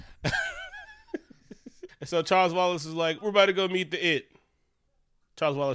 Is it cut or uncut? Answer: cut